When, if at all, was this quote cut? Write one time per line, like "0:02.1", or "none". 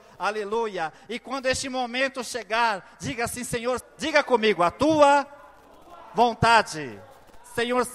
0:03.8